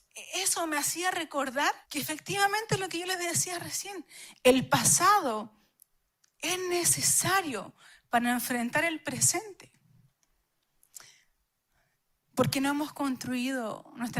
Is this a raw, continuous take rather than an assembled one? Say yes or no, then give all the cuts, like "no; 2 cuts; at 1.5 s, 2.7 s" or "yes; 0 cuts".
no; 2 cuts; at 1.8 s, 12.2 s